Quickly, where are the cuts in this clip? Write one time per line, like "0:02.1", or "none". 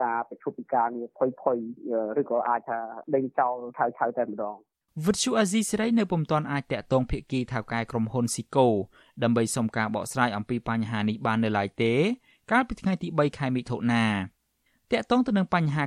none